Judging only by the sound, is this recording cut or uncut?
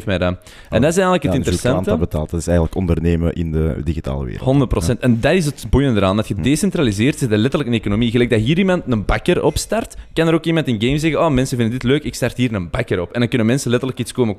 uncut